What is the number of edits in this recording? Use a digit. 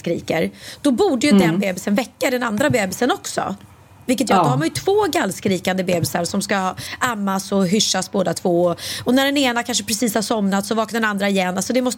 0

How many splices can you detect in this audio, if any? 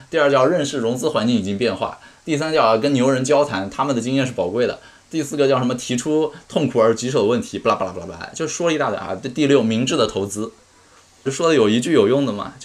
1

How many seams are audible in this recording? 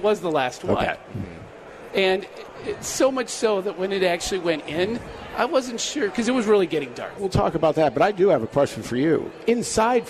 1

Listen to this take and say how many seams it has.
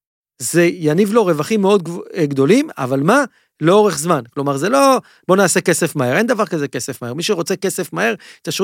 0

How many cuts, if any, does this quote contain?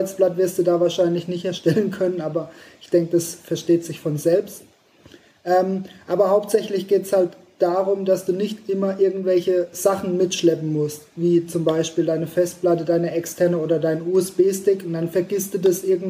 0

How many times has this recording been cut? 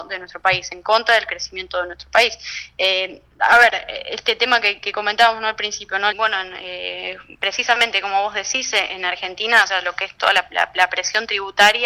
1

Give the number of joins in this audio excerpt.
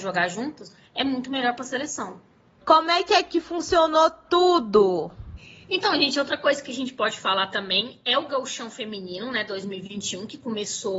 1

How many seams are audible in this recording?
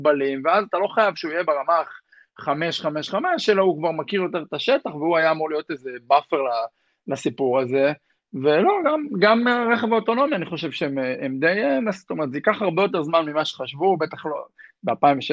0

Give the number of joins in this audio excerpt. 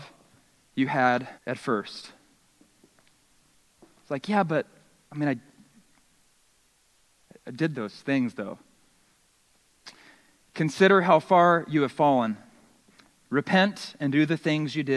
1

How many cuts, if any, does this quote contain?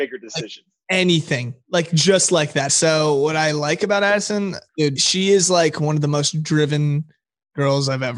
2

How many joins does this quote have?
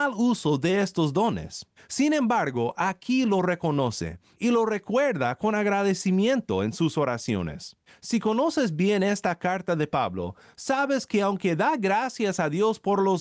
2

